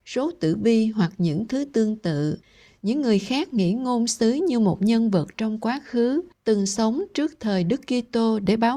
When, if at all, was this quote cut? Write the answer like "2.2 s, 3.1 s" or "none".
none

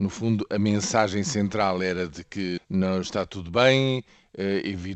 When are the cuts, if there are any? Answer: 2.6 s

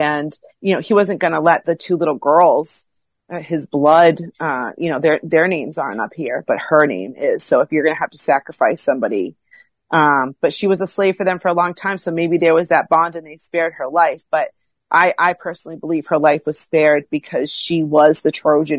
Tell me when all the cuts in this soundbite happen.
none

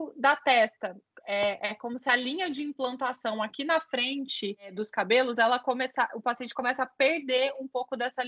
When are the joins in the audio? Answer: none

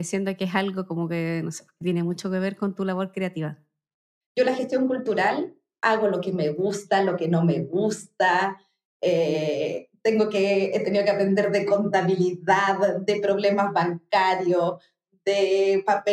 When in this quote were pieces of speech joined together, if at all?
4.2 s

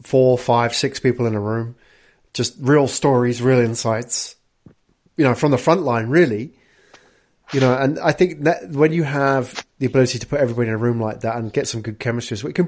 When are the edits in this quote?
none

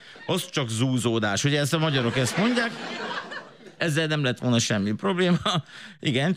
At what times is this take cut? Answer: none

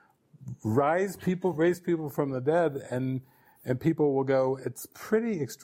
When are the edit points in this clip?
none

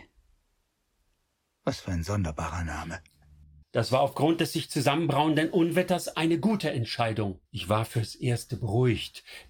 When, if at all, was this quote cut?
1.4 s, 3.6 s, 7.5 s

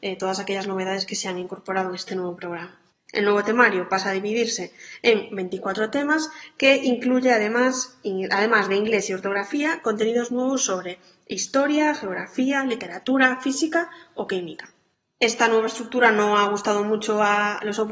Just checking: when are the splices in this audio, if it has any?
3.1 s

